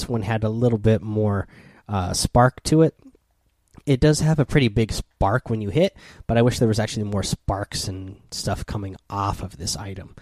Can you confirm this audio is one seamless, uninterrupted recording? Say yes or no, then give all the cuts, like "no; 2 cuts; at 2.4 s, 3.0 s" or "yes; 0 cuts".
yes; 0 cuts